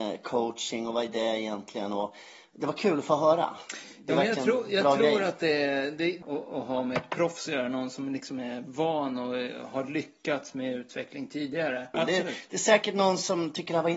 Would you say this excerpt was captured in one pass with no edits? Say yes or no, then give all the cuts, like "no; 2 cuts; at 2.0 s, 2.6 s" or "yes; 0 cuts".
no; 2 cuts; at 6.2 s, 11.9 s